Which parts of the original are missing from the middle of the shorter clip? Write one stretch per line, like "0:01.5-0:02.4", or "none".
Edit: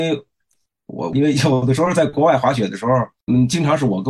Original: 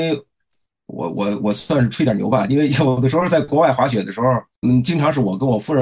0:01.1-0:02.5